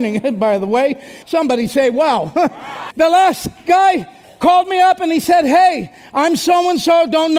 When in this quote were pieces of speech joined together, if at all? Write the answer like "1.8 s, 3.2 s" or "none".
1.2 s, 2.9 s